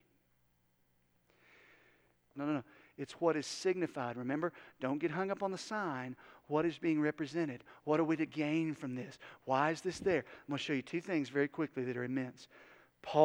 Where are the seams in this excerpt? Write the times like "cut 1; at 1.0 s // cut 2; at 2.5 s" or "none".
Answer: cut 1; at 2.3 s